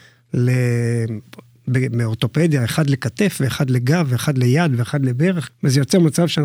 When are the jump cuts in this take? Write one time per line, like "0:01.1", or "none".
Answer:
0:05.5